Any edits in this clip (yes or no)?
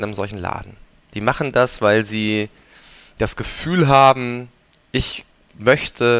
no